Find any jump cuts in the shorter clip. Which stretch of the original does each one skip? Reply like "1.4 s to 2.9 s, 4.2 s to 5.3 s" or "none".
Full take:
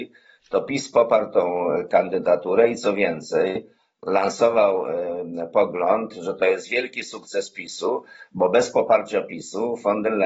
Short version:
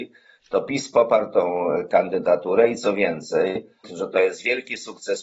3.8 s to 6.1 s